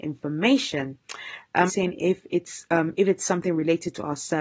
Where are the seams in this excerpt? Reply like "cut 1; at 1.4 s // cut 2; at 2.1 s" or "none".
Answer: cut 1; at 1.7 s

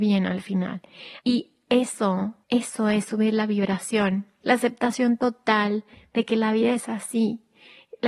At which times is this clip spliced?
cut 1; at 1.2 s // cut 2; at 2.4 s // cut 3; at 4.4 s

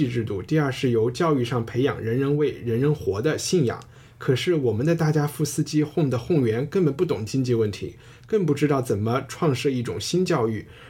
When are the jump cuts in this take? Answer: none

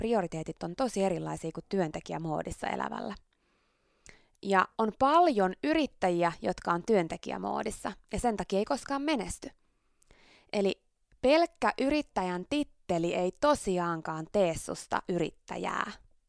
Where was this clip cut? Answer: cut 1; at 4.7 s

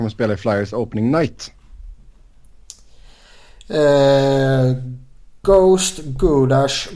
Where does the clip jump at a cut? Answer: none

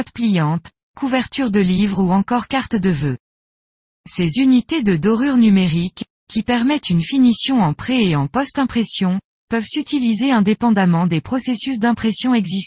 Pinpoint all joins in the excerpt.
cut 1; at 4.0 s

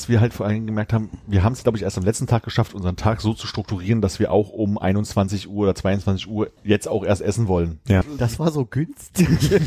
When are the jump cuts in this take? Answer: cut 1; at 6.6 s // cut 2; at 8.0 s

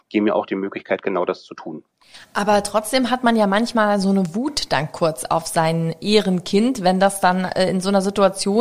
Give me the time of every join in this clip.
none

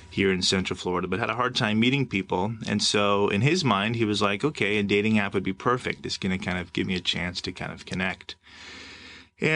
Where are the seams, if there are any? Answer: none

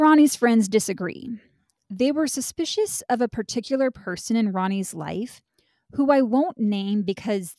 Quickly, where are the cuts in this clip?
none

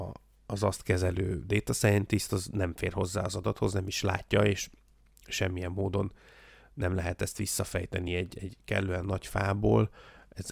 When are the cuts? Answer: none

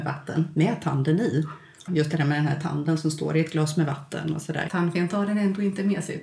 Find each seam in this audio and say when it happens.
cut 1; at 1.9 s // cut 2; at 4.7 s

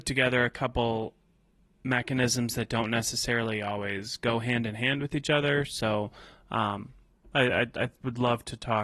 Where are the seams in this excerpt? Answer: none

